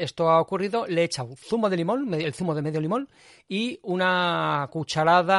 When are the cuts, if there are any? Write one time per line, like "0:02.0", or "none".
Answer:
none